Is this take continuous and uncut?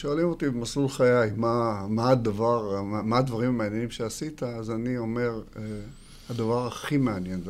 yes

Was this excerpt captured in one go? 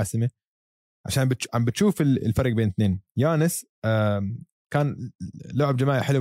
yes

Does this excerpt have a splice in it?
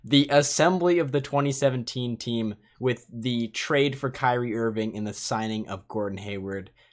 no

